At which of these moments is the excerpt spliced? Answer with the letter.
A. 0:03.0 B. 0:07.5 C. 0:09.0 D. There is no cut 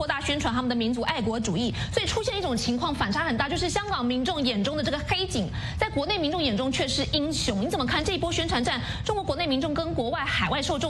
D